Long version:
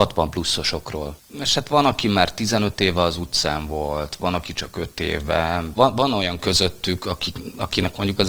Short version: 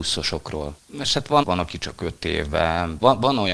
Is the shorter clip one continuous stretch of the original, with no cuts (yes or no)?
no